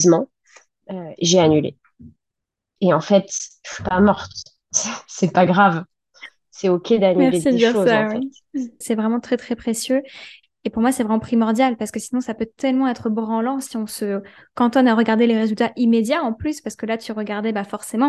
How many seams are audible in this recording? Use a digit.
2